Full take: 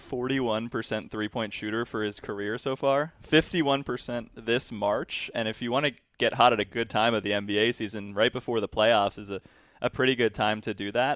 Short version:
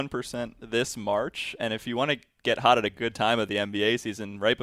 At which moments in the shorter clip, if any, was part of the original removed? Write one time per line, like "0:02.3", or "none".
none